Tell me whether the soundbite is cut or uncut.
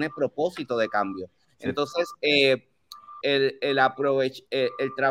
cut